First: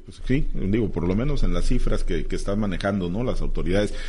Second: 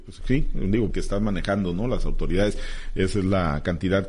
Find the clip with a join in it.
second; 1 cut; at 0.9 s

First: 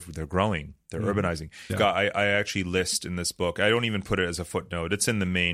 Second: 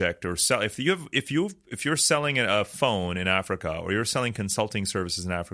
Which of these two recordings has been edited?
first; 1 cut; at 1.7 s

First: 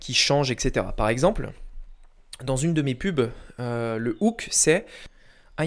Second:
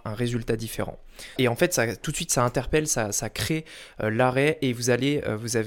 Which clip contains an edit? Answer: second; 1 cut; at 1.4 s

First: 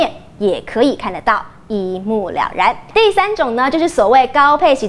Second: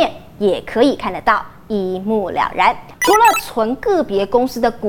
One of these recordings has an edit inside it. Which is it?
second; 1 cut; at 2.9 s

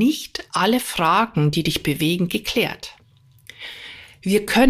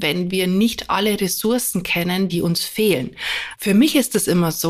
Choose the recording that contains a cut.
second; 2 cuts; at 2.3 s, 3.5 s

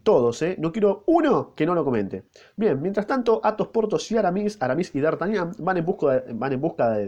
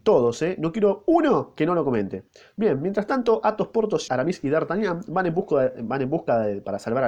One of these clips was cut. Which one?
second; 1 cut; at 4.1 s

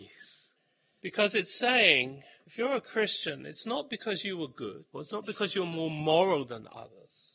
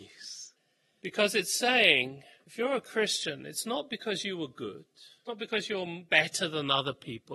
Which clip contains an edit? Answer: first; 1 cut; at 4.9 s

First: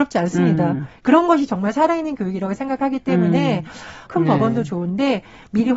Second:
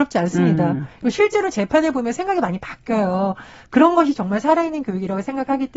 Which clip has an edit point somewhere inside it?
first; 2 cuts; at 1.0 s, 4.1 s

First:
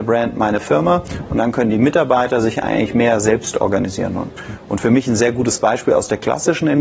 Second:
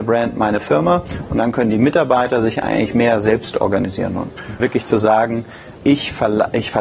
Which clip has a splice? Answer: second; 2 cuts; at 4.6 s, 5.8 s

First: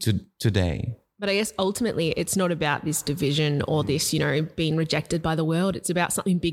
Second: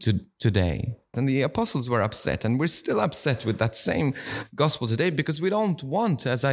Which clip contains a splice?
second; 1 cut; at 1.1 s

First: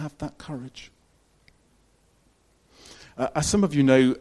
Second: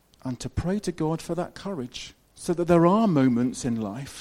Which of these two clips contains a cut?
second; 1 cut; at 2.2 s

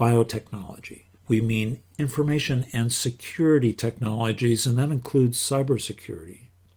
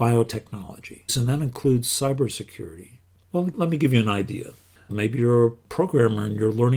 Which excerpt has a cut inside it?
second; 3 cuts; at 1.1 s, 3.2 s, 4.9 s

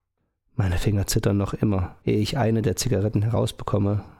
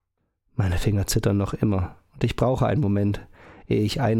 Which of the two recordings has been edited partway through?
first; 1 cut; at 2.0 s

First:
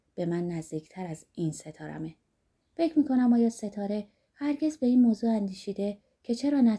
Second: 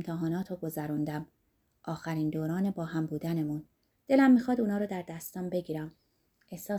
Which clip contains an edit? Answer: second; 1 cut; at 3.9 s

